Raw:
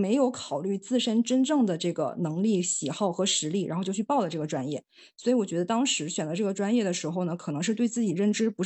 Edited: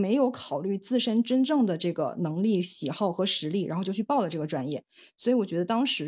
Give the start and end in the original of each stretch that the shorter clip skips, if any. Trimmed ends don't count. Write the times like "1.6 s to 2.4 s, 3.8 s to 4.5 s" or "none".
none